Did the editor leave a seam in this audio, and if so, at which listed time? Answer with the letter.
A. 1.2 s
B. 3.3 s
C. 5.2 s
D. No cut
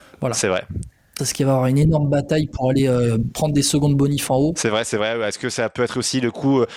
A